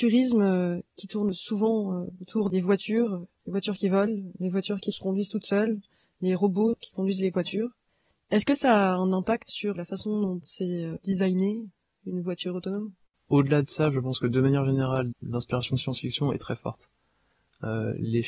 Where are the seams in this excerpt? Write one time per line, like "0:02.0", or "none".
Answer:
0:15.1

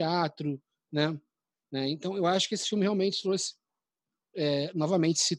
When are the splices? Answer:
0:01.6

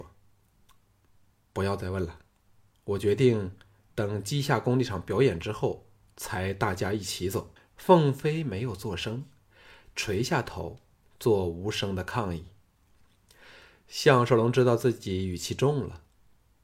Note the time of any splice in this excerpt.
0:07.6

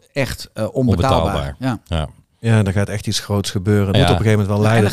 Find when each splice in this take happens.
0:03.9

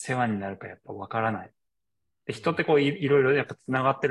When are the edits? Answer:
none

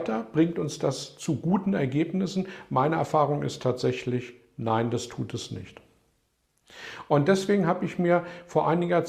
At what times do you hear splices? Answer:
none

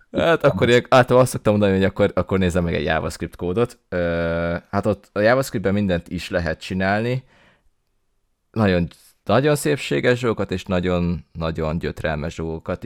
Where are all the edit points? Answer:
none

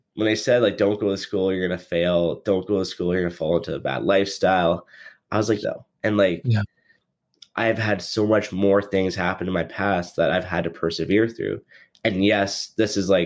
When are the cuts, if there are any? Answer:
0:05.6

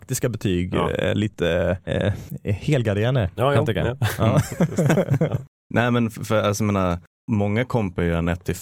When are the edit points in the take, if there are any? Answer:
0:04.6

